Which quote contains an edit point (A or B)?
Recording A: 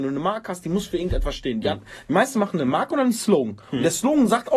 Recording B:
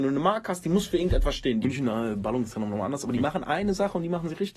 B